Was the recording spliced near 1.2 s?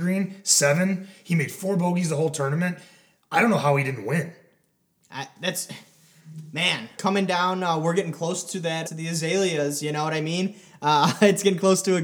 no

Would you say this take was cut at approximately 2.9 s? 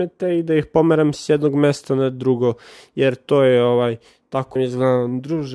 no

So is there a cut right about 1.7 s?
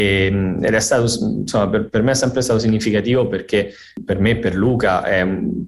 no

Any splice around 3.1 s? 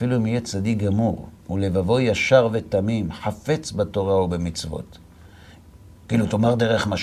no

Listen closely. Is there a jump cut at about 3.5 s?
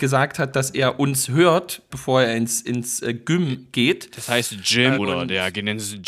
no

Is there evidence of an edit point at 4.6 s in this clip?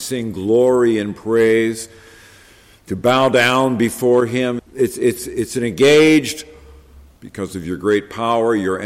yes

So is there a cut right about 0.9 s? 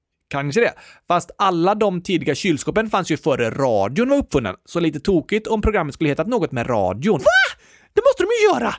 no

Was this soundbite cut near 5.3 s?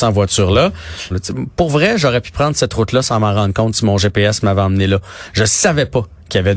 no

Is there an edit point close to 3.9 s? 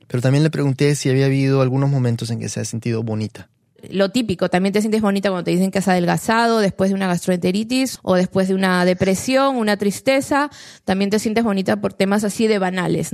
no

